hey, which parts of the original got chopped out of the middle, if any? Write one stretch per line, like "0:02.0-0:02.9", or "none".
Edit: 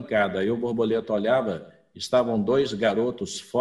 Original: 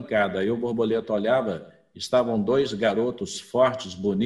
none